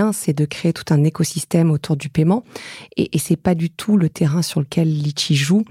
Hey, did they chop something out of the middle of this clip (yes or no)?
no